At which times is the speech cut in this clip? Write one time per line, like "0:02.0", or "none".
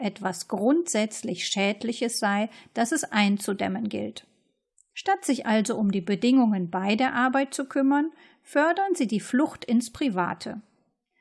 none